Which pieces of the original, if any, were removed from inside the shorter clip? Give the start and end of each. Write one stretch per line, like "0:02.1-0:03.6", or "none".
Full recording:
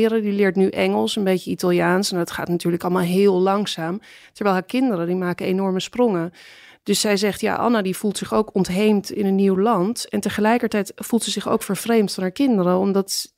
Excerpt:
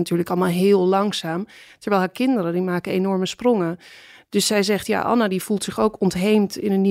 none